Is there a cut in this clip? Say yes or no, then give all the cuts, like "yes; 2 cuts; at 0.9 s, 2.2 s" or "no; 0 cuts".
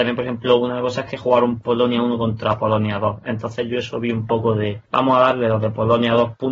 yes; 1 cut; at 4.8 s